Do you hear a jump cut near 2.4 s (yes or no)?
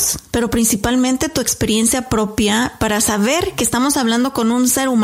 no